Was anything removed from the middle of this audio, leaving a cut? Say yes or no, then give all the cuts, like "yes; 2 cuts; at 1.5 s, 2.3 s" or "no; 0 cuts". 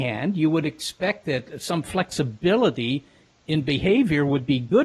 no; 0 cuts